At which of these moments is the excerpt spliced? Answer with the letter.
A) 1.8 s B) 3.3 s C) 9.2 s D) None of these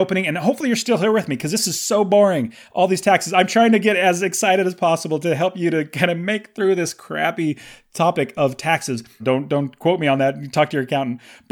C